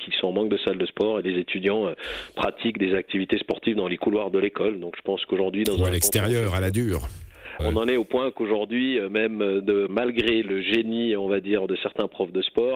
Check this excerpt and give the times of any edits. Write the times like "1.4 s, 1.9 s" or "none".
7.6 s, 9.9 s